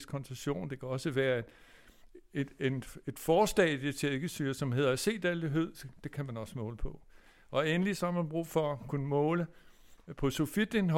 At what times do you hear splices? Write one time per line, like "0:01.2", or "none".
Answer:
none